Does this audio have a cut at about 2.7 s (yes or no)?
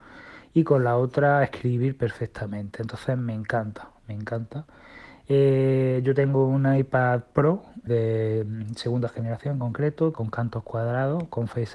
no